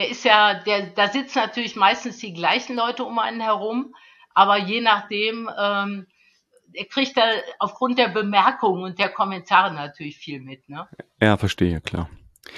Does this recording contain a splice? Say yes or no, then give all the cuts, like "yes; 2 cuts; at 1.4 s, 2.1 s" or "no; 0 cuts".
no; 0 cuts